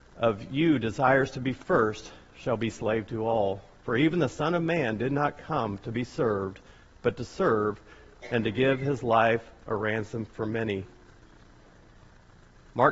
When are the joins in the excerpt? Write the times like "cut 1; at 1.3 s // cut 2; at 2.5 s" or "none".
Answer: none